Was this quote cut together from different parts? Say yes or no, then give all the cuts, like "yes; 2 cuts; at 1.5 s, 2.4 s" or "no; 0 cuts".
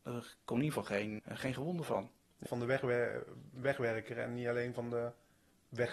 yes; 2 cuts; at 1.2 s, 2.5 s